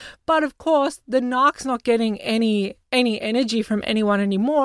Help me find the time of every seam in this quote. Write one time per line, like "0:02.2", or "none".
none